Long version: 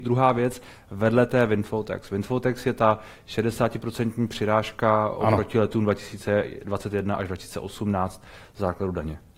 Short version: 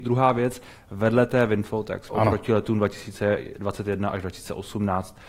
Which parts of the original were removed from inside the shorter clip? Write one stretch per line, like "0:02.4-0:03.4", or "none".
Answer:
0:02.1-0:05.1

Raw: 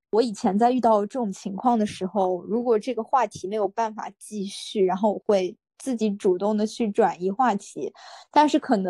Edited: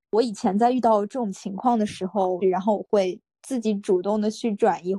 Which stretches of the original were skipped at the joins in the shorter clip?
0:02.4-0:04.8

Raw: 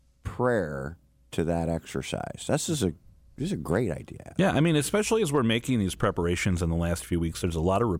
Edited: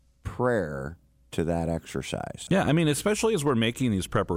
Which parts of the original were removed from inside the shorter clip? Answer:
0:02.5-0:04.3

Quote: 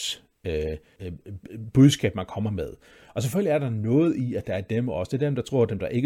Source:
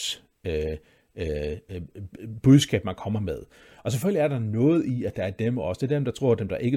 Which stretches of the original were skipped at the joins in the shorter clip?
0:01.0-0:01.7

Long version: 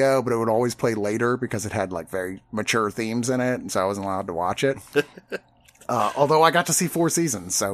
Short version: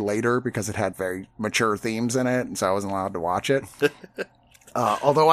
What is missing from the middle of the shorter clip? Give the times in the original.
0:01.9-0:02.1

